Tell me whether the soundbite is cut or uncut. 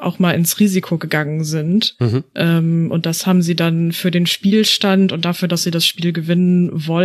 uncut